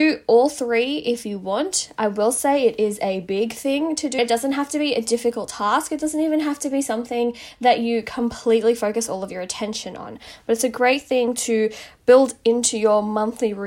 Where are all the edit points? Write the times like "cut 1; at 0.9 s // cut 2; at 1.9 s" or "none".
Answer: cut 1; at 4.2 s